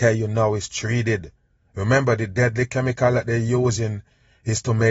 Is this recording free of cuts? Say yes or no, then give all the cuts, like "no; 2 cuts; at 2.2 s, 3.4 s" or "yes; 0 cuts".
yes; 0 cuts